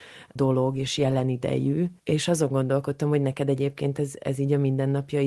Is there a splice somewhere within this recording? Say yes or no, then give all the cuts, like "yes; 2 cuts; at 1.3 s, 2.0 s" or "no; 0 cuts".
yes; 1 cut; at 2.0 s